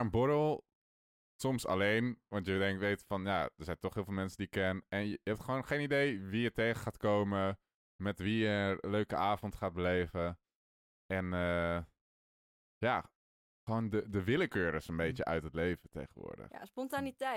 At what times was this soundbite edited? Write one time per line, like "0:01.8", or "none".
none